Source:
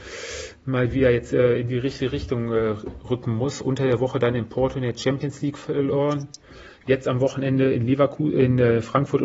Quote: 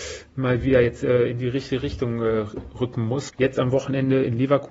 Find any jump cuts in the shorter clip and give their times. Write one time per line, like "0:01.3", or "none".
0:03.3